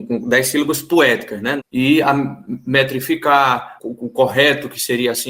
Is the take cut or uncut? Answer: cut